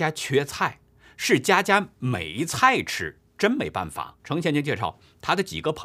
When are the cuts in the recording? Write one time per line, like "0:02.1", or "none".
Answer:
0:04.2